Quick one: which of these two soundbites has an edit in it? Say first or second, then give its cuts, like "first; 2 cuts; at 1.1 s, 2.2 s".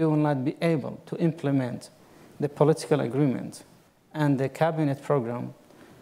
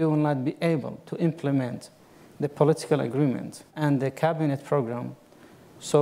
second; 1 cut; at 3.7 s